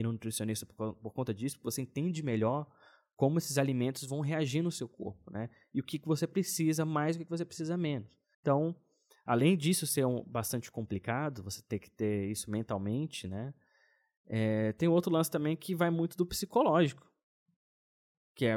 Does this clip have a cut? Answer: yes; 1 cut; at 8.3 s

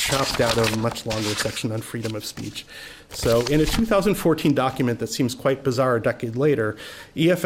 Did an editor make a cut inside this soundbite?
no; 0 cuts

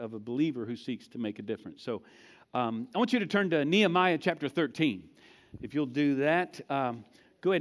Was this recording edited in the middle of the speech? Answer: no; 0 cuts

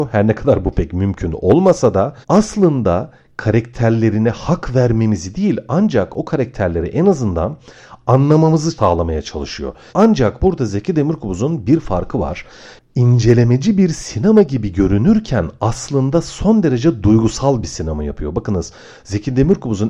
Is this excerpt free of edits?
no; 2 cuts; at 2.2 s, 9.9 s

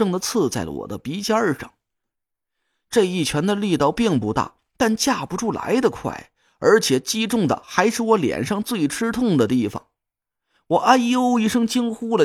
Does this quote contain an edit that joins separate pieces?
no; 0 cuts

